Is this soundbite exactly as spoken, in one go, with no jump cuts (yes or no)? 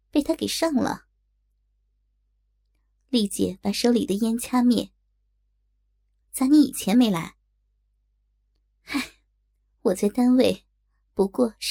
no